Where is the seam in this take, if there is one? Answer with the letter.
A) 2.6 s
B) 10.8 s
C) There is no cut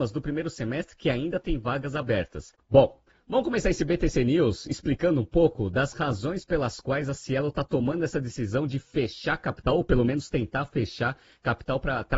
C